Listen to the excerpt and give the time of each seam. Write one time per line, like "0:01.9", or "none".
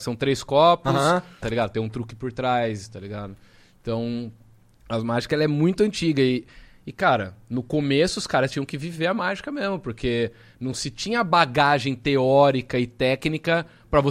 0:01.4